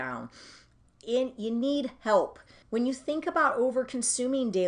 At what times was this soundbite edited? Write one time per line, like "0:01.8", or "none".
0:02.6